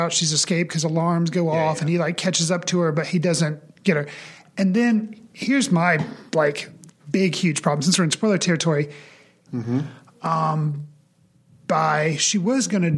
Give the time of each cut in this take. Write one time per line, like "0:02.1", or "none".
0:09.5